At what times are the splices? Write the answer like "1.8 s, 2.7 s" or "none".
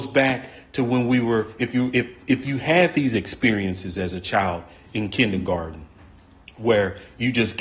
none